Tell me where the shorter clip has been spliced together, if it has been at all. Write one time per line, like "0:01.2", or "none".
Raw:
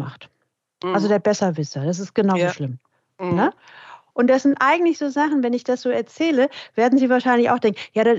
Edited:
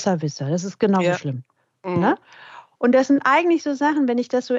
none